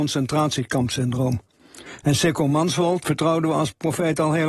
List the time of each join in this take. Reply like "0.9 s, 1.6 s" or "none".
3.0 s